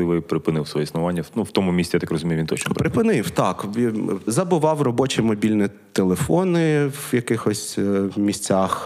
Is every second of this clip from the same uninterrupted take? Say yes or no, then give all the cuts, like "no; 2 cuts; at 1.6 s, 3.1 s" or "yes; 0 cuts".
no; 1 cut; at 4.3 s